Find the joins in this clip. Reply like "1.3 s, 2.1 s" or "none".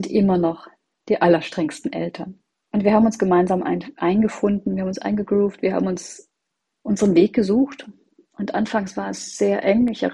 none